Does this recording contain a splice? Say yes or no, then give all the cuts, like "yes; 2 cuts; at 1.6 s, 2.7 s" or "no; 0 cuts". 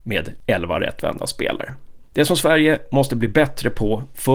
no; 0 cuts